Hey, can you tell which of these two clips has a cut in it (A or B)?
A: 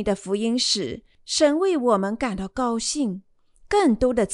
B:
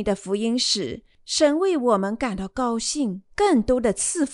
B